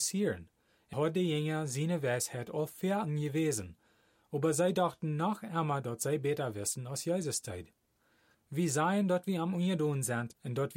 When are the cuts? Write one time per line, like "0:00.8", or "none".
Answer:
0:00.9
0:08.3

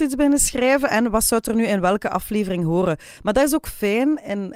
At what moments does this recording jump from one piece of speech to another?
0:03.2

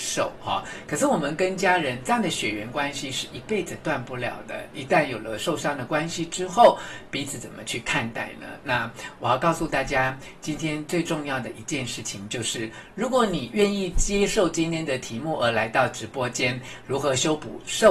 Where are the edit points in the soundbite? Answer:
none

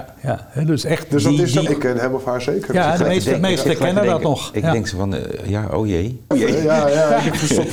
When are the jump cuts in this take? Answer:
0:01.7
0:06.3

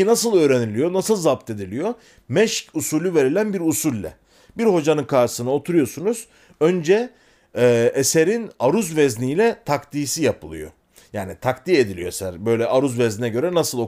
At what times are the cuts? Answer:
none

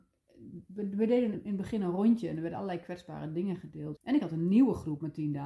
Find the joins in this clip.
0:01.3
0:04.0

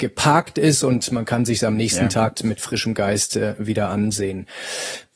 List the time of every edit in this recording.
0:02.3

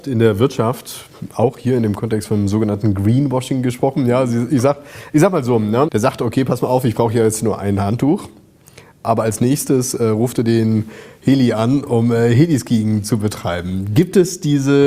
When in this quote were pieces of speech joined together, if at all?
0:05.9

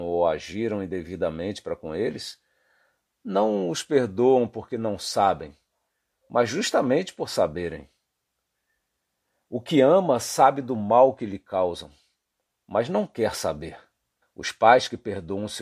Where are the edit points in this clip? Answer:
0:14.2

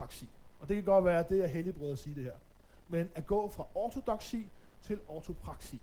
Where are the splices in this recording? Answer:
none

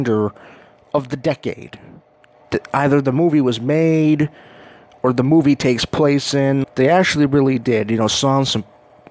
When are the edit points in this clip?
0:06.6

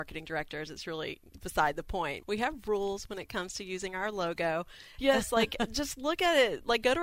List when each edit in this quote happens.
0:02.2
0:05.0

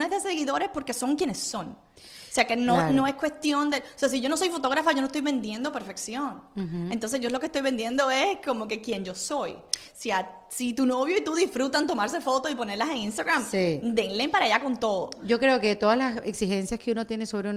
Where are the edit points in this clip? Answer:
0:09.9

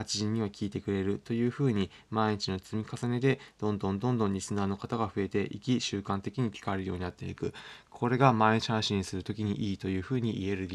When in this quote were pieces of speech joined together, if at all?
none

